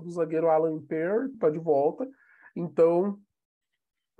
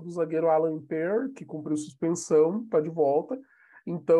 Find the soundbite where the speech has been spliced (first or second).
first